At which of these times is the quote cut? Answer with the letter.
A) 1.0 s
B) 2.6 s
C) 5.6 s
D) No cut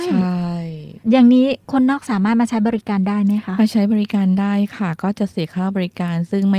A